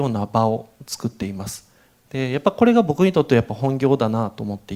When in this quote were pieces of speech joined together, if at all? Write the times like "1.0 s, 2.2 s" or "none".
none

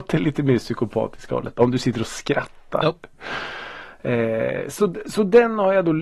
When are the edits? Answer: none

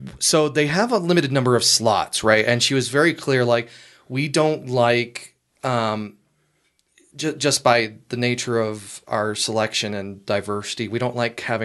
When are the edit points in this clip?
none

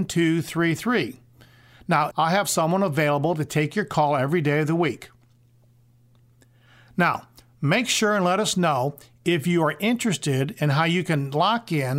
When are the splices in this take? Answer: 2.1 s

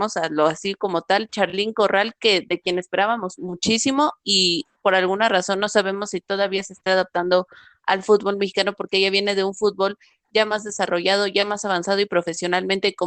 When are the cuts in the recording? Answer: none

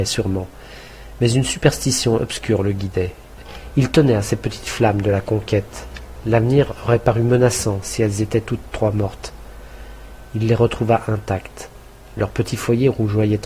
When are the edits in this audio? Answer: 10.2 s

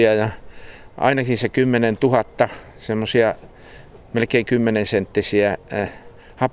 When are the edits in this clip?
none

